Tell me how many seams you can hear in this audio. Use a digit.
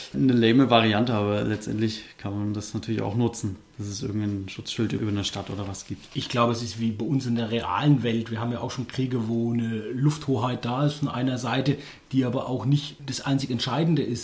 0